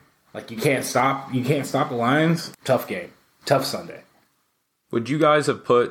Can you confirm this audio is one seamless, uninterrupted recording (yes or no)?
no